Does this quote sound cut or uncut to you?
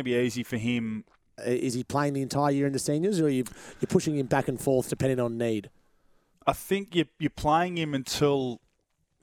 cut